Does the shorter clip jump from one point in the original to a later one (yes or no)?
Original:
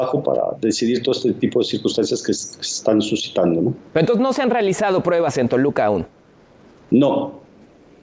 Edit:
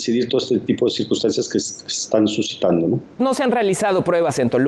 yes